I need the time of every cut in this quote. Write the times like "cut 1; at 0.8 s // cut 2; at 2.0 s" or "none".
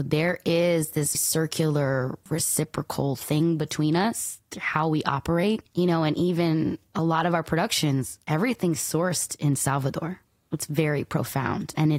cut 1; at 1.1 s // cut 2; at 10.5 s